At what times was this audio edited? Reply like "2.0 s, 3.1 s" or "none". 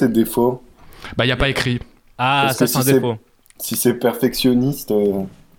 none